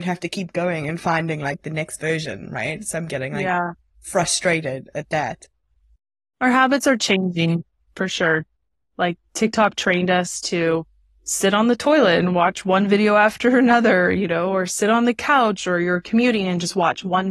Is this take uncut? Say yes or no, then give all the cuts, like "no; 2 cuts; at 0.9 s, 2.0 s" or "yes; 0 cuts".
yes; 0 cuts